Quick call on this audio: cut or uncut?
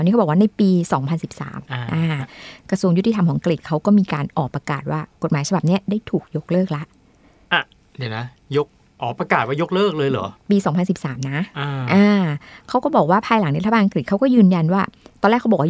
uncut